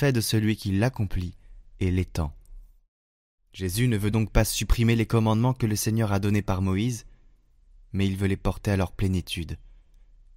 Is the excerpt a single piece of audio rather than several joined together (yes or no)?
yes